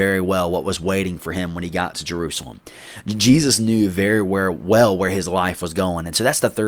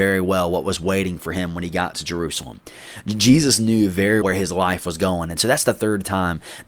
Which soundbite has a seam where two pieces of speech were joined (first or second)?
second